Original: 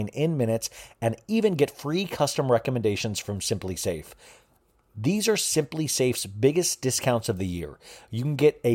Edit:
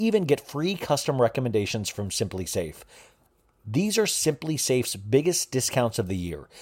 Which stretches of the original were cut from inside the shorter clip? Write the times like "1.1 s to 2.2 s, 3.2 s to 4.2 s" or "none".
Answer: none